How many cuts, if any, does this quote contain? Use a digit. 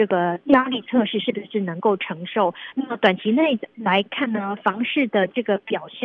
1